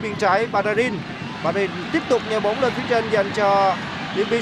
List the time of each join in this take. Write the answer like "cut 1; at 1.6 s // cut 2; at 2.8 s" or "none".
none